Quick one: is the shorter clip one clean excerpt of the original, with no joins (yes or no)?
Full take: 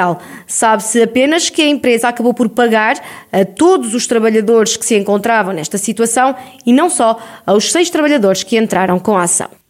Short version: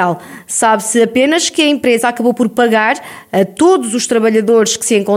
yes